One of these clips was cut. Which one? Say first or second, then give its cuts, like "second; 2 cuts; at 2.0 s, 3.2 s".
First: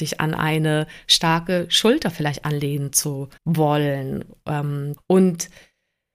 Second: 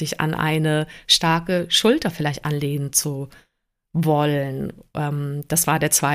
first; 2 cuts; at 3.4 s, 5.0 s